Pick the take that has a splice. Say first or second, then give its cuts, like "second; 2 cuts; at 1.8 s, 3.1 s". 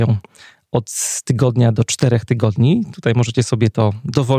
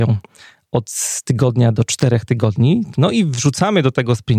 second; 1 cut; at 2.9 s